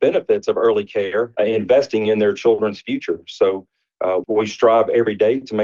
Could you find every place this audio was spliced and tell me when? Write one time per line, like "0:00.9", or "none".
0:01.4
0:04.2